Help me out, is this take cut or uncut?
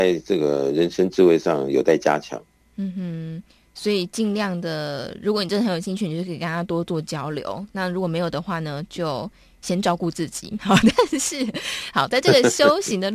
uncut